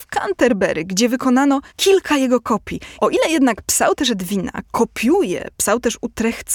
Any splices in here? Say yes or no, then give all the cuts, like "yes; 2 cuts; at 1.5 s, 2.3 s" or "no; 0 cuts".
yes; 2 cuts; at 1.7 s, 3.0 s